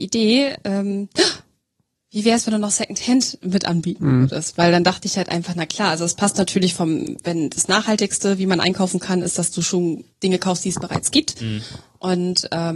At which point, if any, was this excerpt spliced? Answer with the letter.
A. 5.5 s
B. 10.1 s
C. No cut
B